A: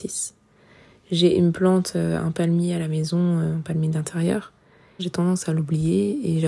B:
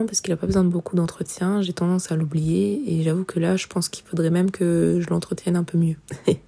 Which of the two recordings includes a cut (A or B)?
A